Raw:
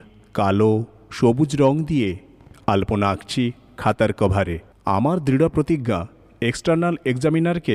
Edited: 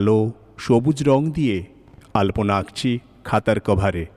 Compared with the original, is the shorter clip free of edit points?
yes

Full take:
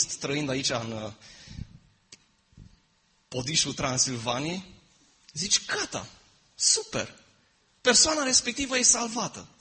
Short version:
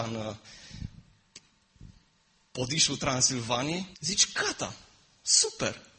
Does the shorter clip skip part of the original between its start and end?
yes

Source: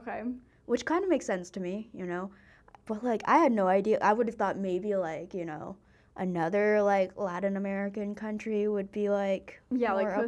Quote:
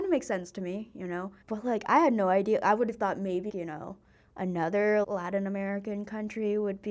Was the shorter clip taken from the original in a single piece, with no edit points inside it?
no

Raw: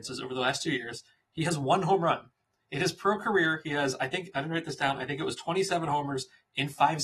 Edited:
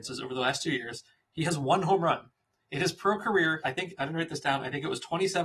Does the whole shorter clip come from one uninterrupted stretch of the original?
no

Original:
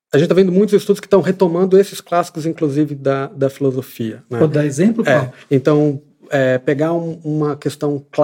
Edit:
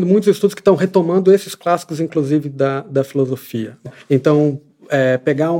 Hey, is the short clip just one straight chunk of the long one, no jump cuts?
no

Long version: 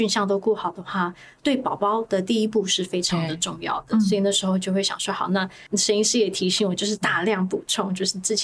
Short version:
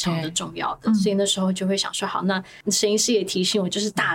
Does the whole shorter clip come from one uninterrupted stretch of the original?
yes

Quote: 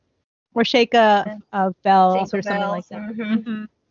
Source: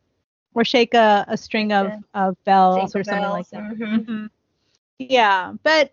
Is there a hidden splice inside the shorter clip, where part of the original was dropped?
yes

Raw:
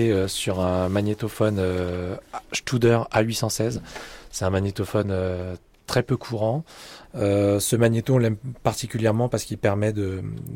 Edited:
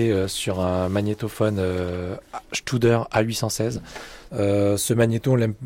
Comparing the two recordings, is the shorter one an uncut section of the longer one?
no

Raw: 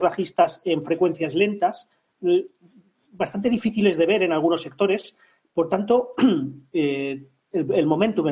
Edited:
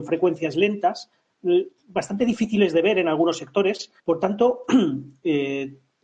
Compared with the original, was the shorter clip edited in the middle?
yes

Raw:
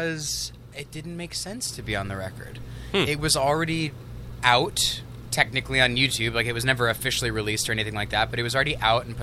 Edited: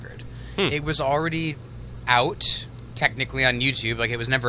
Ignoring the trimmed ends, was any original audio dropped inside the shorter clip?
no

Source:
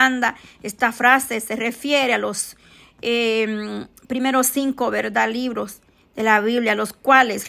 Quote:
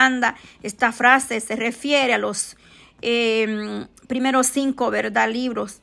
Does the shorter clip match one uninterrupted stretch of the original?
yes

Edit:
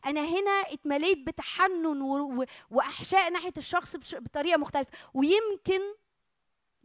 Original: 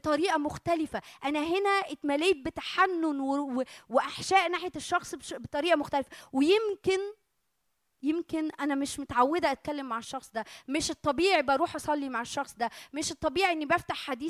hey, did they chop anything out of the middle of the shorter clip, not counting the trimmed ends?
no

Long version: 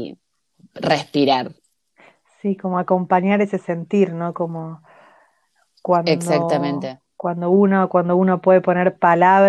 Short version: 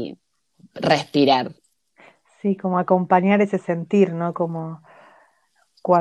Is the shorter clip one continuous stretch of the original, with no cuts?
yes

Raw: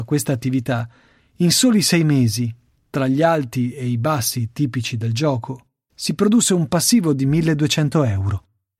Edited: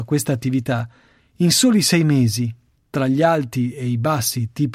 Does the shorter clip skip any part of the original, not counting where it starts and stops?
no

